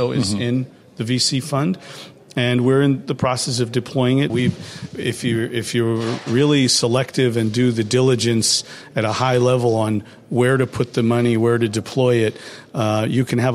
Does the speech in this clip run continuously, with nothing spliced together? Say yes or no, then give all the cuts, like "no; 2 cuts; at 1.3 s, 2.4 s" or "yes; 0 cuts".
no; 1 cut; at 4.3 s